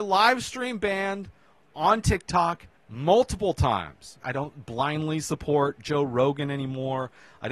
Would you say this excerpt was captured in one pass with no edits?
no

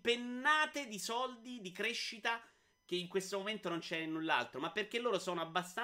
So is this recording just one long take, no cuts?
yes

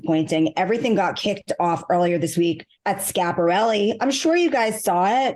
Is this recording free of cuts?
no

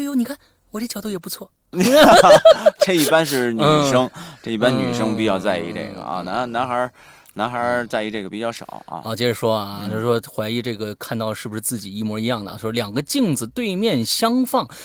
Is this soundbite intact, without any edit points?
yes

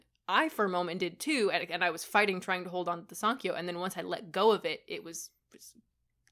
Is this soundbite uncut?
yes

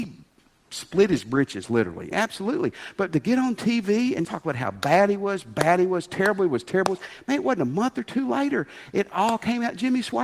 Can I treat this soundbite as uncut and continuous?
no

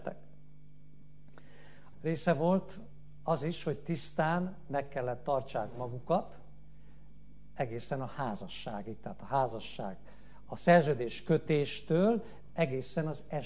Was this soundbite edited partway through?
yes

